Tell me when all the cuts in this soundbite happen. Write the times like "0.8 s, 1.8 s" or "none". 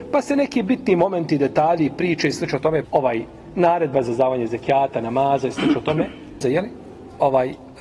2.8 s, 6.4 s